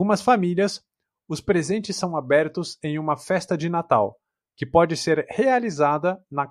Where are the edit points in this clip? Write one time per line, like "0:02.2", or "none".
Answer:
none